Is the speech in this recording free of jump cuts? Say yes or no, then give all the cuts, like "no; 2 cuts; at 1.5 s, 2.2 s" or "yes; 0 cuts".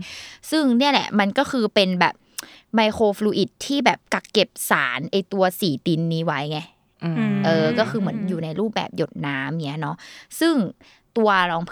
yes; 0 cuts